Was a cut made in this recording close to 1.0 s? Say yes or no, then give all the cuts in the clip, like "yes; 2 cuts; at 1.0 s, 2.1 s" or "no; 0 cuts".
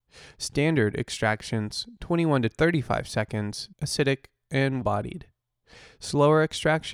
no; 2 cuts; at 3.7 s, 4.8 s